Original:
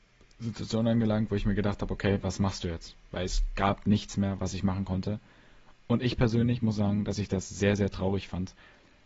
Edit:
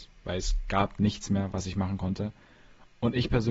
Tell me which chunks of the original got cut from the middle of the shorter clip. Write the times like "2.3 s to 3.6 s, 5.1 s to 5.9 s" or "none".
none